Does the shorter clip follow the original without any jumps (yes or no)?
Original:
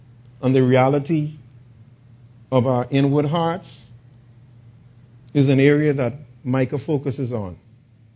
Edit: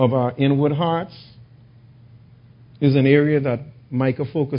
yes